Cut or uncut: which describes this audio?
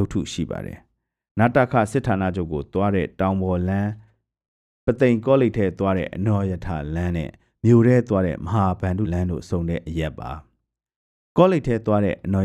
cut